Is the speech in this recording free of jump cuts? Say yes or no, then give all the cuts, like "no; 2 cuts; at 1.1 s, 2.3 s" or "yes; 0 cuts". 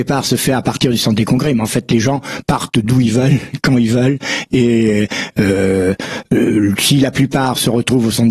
yes; 0 cuts